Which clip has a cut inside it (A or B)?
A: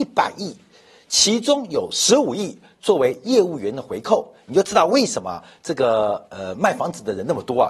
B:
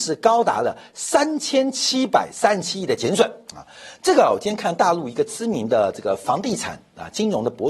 A